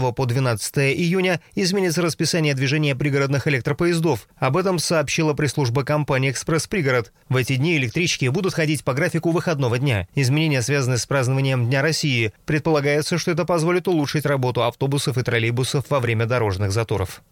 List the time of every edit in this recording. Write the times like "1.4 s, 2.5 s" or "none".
12.4 s